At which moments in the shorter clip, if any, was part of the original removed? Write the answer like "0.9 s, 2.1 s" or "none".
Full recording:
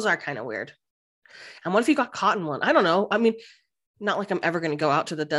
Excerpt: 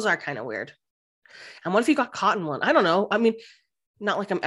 none